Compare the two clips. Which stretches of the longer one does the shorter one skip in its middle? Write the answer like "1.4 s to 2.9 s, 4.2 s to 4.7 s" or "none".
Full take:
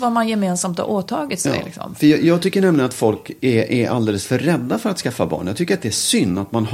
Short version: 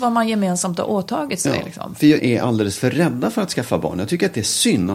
2.2 s to 3.7 s